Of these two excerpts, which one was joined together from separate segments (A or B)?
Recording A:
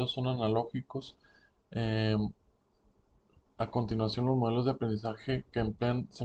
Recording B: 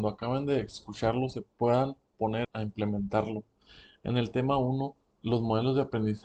B